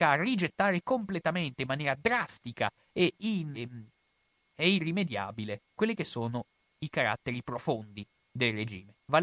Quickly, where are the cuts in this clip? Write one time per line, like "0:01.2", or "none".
0:03.5
0:05.7